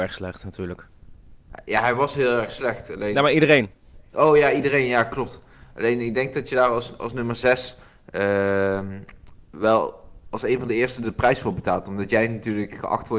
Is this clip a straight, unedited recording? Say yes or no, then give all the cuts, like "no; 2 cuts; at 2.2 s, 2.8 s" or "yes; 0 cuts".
yes; 0 cuts